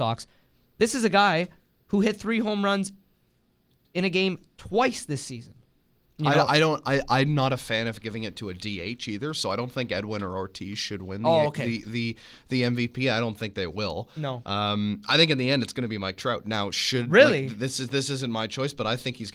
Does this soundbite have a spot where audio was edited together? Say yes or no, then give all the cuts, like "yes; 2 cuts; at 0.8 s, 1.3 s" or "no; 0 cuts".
yes; 1 cut; at 6.1 s